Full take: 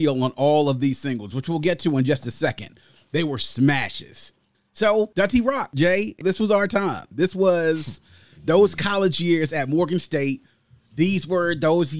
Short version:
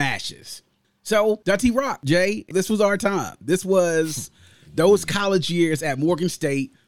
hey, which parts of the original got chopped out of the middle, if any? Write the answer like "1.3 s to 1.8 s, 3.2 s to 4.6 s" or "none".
none